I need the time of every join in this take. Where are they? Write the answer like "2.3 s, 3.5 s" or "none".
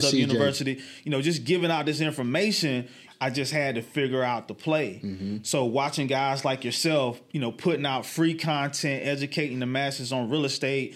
3.1 s